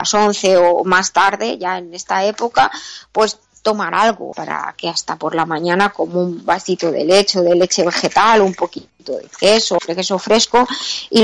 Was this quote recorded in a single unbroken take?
no; 2 cuts; at 4.3 s, 9.8 s

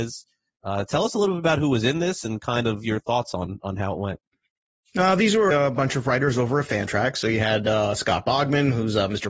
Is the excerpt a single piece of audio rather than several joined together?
no; 1 cut; at 5.5 s

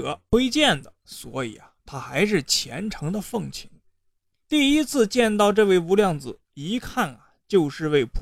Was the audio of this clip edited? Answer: yes; 1 cut; at 4.3 s

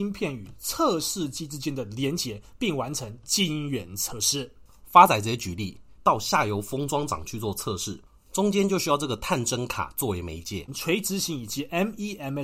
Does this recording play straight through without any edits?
no; 2 cuts; at 6.0 s, 10.7 s

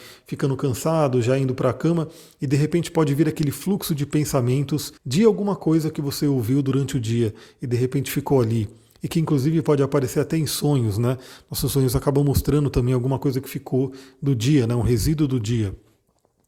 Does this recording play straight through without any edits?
no; 1 cut; at 5.0 s

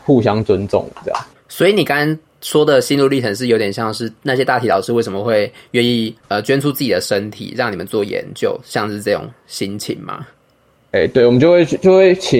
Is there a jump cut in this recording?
yes; 1 cut; at 1.4 s

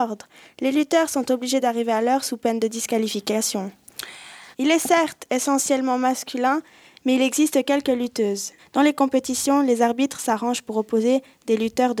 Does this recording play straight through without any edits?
no; 2 cuts; at 4.5 s, 8.6 s

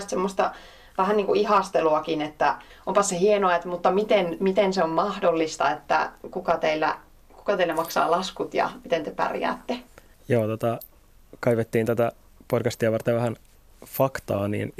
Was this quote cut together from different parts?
no; 0 cuts

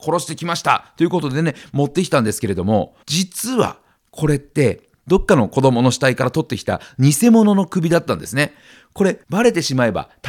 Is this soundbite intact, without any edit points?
no; 2 cuts; at 3.0 s, 4.9 s

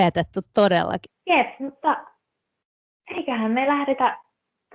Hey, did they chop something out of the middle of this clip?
yes; 1 cut; at 1.1 s

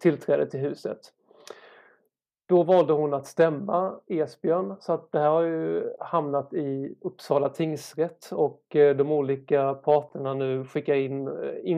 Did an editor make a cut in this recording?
no; 0 cuts

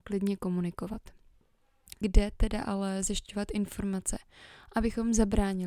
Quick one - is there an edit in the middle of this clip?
yes; 1 cut; at 2.0 s

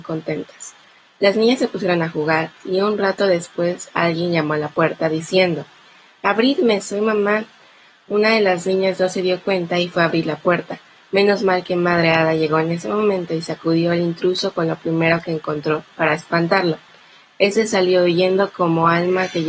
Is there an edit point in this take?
no; 0 cuts

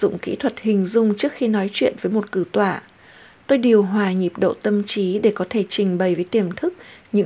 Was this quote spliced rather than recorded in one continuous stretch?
no; 0 cuts

